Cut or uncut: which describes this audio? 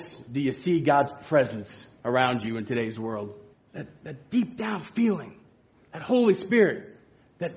cut